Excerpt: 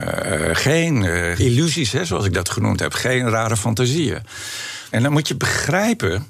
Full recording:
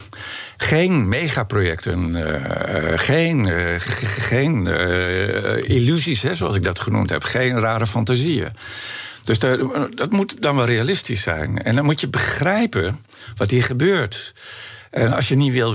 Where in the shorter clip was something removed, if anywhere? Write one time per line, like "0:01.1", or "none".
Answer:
0:01.4
0:04.9

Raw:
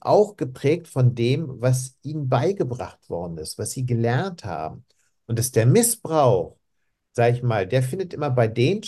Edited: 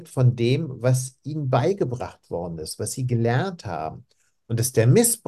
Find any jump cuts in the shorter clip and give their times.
none

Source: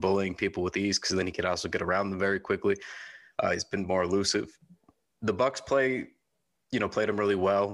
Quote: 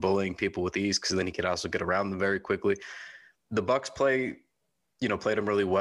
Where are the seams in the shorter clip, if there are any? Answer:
0:03.4

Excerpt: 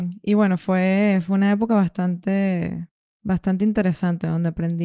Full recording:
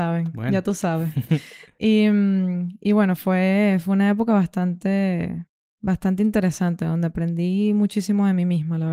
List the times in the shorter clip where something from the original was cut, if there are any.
none

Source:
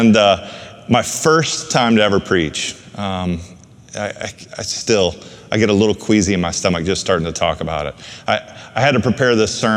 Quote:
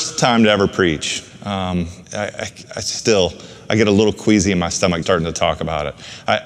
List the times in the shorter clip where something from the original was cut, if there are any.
0:02.0
0:05.0

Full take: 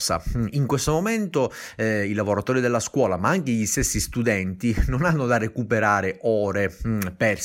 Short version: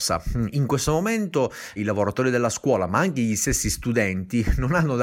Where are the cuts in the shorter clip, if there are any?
0:01.8

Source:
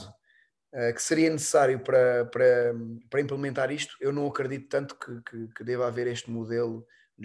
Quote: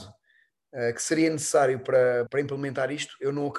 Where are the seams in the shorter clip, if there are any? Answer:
0:02.3

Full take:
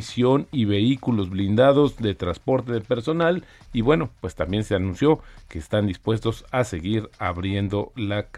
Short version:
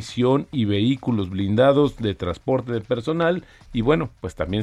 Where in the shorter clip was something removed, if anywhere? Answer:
none

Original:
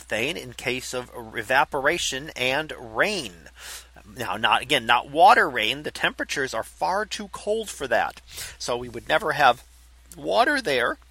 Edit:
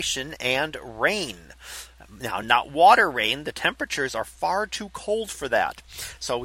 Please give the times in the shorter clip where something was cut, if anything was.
0:02.4

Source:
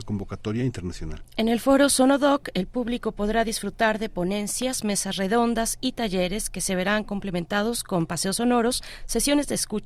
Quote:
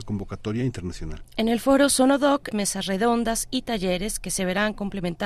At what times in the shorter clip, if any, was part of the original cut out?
0:02.5

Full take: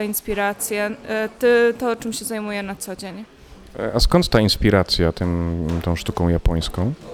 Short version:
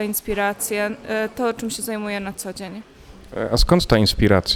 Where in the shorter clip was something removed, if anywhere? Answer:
0:01.3

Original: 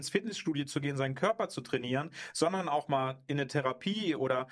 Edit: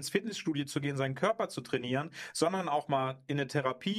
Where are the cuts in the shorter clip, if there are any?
none

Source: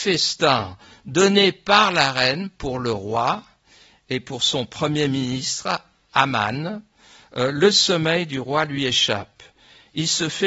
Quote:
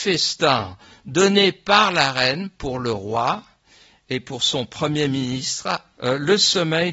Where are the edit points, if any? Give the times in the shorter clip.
0:06.0

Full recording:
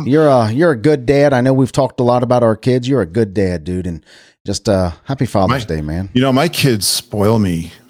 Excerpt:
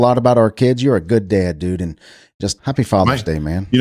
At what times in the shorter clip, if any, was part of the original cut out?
0:02.6

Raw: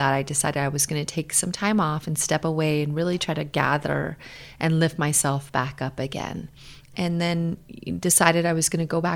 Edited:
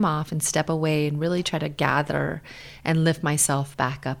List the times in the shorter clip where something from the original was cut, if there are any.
none

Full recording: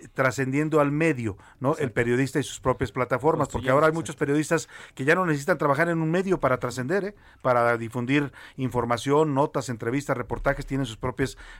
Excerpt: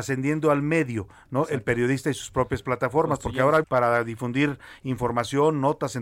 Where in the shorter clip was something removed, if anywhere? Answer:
0:03.6

